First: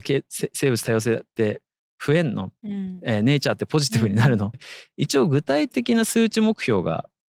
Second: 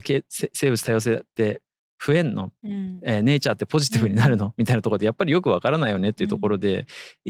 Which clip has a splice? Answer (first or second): first